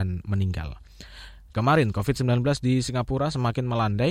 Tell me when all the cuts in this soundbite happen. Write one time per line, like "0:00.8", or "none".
0:01.5

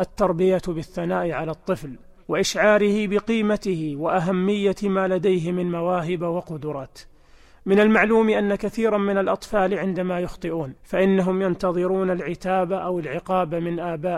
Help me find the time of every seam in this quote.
0:10.8

